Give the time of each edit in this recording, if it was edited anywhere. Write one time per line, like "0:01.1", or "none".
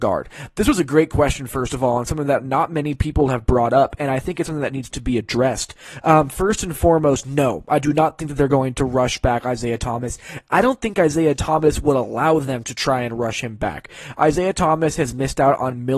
none